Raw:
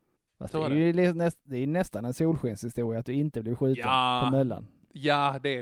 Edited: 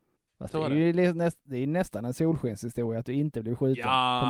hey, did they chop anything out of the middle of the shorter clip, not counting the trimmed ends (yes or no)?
no